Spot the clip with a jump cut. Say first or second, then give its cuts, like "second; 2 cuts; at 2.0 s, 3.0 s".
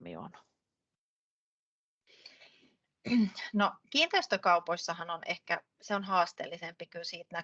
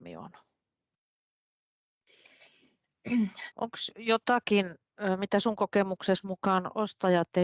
second; 1 cut; at 3.5 s